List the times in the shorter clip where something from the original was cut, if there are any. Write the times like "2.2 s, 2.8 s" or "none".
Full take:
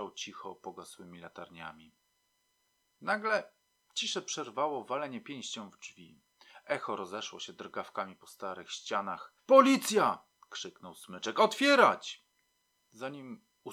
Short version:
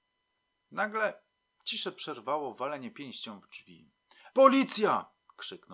4.3 s